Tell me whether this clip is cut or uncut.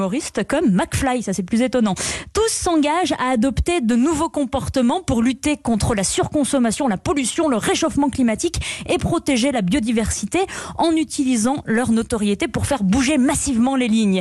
uncut